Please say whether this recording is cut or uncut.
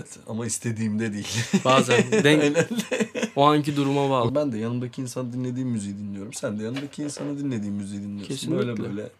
cut